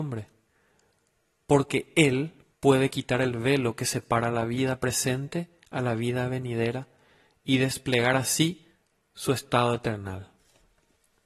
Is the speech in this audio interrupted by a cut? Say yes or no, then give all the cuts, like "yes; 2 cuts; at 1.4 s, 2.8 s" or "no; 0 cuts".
no; 0 cuts